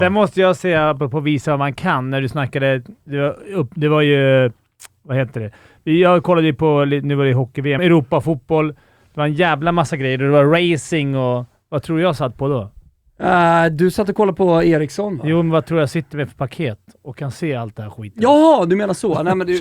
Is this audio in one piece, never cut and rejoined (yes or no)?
no